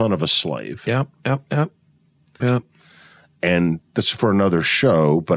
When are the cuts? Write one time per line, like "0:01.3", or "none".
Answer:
0:02.4